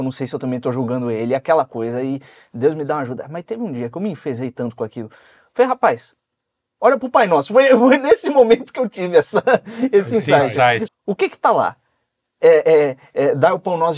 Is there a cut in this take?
yes; 1 cut; at 10.9 s

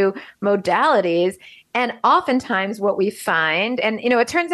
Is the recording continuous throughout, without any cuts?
yes; 0 cuts

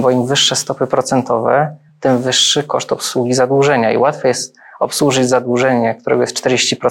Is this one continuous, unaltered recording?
yes; 0 cuts

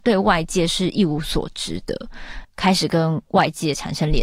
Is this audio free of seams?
no; 1 cut; at 2.4 s

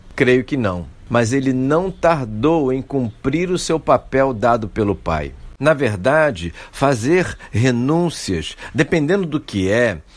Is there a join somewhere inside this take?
no; 0 cuts

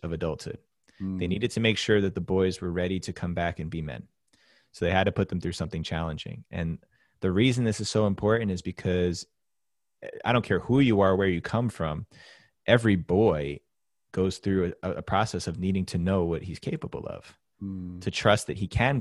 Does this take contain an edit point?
no; 0 cuts

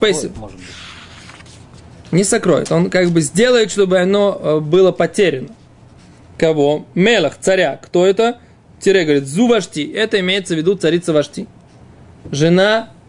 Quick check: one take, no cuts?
yes; 0 cuts

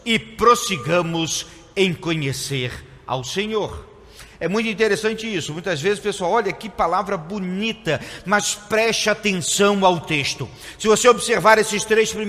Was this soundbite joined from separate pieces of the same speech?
no; 0 cuts

